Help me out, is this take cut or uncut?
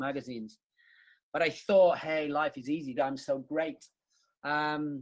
cut